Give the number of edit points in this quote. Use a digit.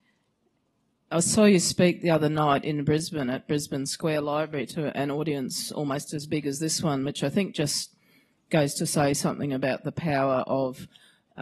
0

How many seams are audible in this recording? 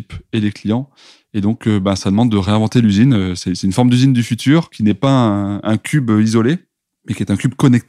0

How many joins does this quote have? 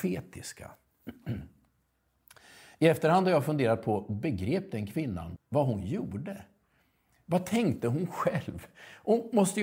1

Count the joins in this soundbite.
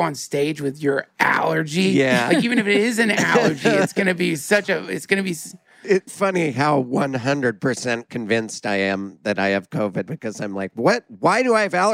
2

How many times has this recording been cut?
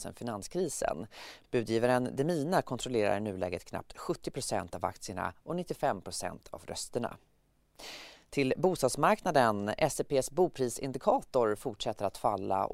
1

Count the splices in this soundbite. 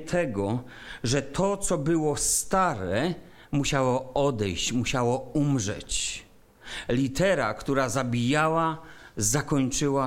0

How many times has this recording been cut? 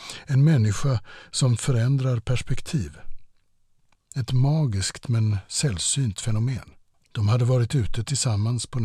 2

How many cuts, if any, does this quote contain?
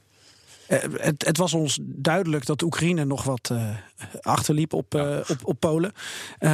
0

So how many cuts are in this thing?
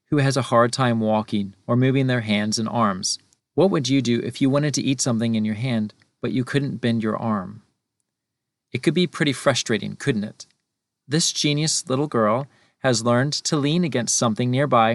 1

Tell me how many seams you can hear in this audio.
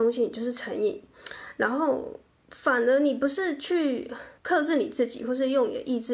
1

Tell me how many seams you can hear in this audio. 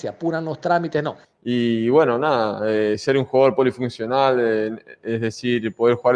1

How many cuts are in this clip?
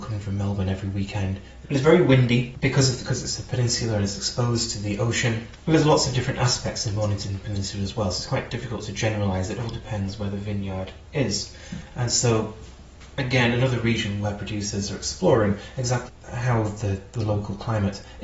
1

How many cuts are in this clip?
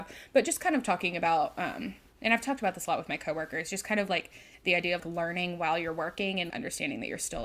2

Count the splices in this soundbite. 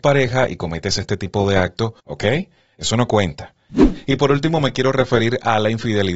1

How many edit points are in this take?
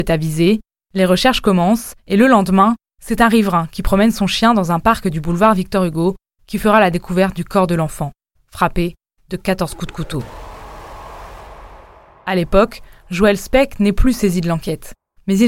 0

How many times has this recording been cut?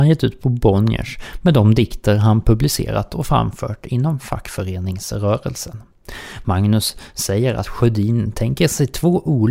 0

